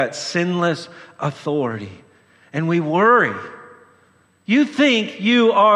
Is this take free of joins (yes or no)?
no